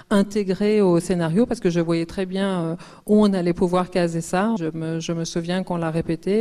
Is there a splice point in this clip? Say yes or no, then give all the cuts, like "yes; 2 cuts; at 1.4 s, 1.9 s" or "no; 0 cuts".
yes; 1 cut; at 4.6 s